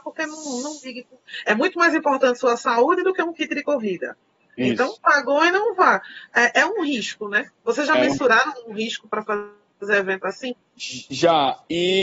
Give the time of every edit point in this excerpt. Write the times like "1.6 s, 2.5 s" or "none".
none